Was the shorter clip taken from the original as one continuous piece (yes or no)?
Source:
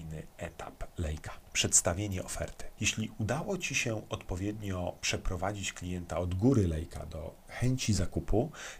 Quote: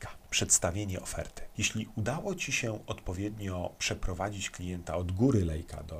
yes